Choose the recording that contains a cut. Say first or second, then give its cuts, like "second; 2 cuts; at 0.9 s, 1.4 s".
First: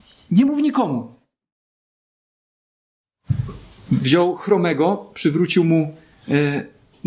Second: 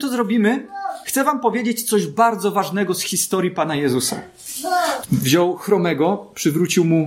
second; 1 cut; at 5.0 s